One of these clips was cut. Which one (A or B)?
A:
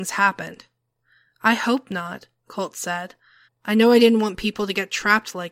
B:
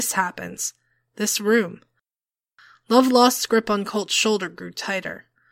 A